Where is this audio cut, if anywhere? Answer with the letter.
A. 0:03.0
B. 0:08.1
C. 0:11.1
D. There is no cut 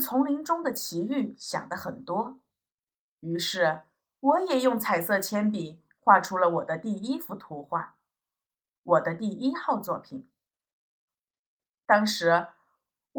C